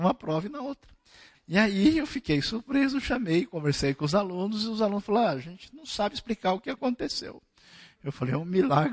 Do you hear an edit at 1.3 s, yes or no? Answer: yes